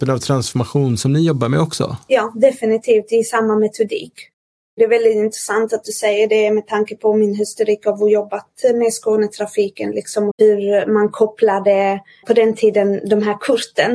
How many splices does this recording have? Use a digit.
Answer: 2